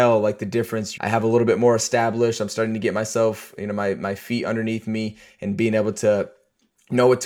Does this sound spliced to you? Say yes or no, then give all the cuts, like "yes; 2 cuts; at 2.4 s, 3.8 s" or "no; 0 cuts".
yes; 1 cut; at 1.0 s